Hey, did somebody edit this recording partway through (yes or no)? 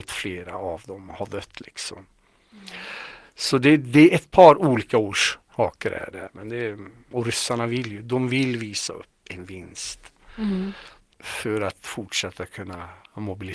no